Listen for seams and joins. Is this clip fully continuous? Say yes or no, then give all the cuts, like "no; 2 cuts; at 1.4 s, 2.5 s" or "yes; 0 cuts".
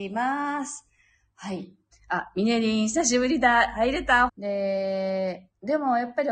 no; 2 cuts; at 1.9 s, 4.3 s